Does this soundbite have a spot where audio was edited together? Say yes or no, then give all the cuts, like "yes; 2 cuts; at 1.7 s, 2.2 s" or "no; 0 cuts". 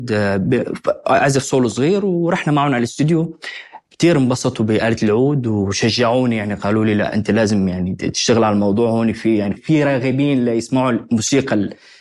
yes; 1 cut; at 9.6 s